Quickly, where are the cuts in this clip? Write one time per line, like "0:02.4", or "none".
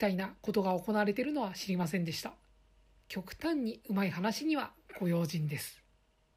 0:03.0

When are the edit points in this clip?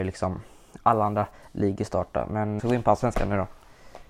0:02.6

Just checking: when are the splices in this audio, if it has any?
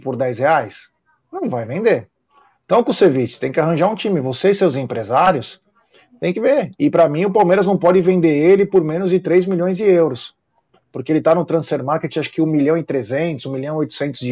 none

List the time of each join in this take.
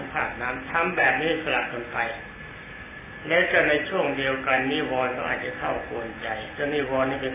none

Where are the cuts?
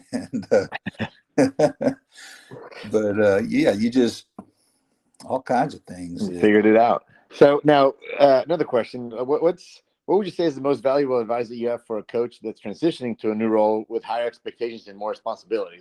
0:07.3
0:08.4

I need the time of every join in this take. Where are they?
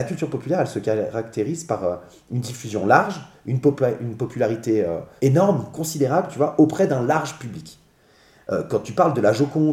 0:05.2

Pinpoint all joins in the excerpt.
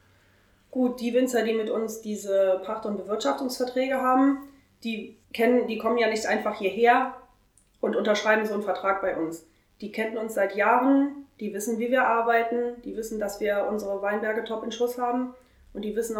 0:05.2

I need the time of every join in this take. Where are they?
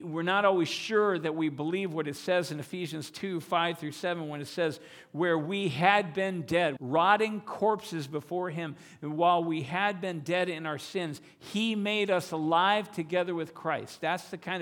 0:06.8

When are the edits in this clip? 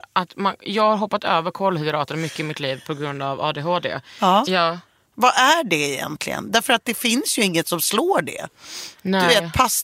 0:04.4

